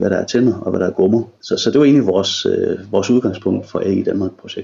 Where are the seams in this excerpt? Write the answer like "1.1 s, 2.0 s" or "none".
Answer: 1.4 s